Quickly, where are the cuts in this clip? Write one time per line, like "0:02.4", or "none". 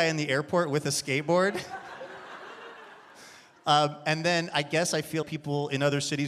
0:05.2